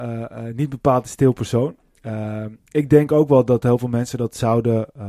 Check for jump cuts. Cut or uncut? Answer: uncut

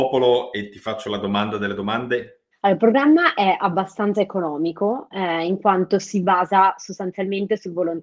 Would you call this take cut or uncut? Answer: cut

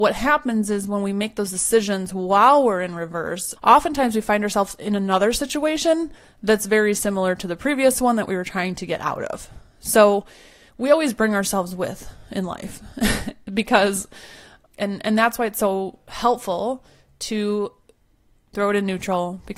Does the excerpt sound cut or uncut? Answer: cut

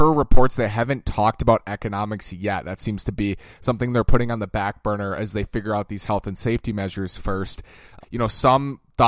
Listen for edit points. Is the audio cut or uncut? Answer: cut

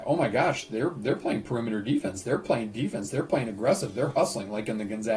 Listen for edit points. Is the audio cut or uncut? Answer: uncut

